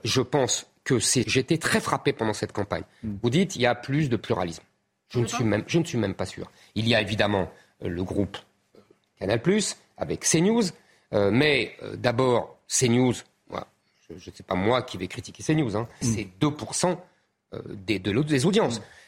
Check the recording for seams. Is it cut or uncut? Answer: cut